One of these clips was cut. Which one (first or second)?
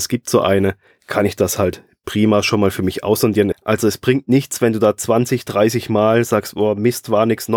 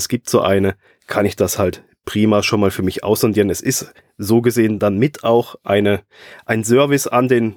first